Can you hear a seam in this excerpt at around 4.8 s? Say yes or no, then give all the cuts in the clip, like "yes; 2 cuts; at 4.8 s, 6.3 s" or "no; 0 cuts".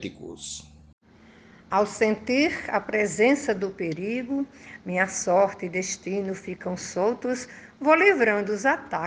yes; 1 cut; at 4.8 s